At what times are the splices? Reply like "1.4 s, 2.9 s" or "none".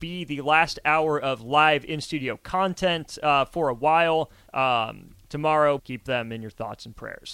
4.5 s, 5.8 s